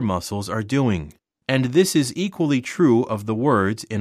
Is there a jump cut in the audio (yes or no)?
yes